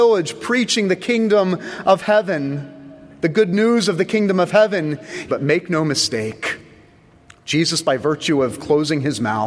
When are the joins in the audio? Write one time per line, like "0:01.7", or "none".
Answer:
0:05.3

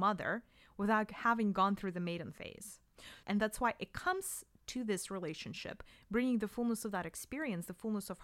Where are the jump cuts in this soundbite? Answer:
0:03.2

